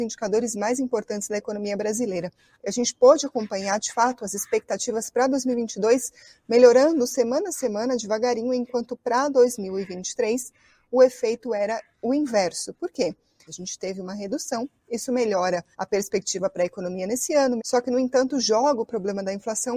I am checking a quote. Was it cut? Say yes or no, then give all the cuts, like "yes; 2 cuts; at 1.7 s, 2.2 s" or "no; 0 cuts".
yes; 3 cuts; at 13.5 s, 15.7 s, 17.6 s